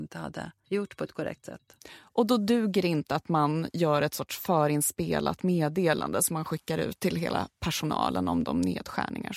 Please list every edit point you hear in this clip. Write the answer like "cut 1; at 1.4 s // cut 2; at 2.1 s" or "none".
none